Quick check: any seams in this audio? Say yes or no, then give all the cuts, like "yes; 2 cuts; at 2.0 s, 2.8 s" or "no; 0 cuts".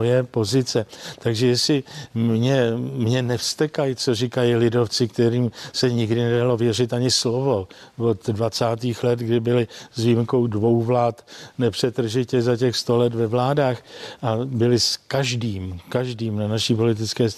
no; 0 cuts